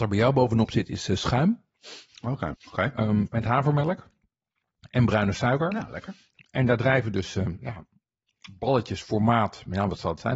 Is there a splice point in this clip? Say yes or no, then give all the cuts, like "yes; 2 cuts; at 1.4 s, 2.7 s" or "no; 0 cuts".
yes; 1 cut; at 2.5 s